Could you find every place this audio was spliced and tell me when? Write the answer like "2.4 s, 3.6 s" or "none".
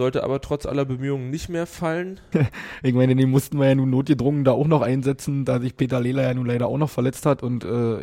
2.3 s